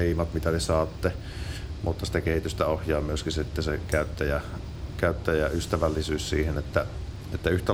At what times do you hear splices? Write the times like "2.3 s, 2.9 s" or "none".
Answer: none